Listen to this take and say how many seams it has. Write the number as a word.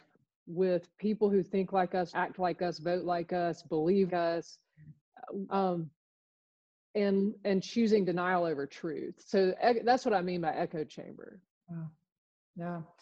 three